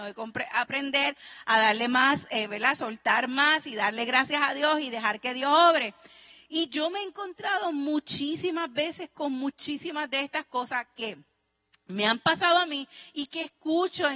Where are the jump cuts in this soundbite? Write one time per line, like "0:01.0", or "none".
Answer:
none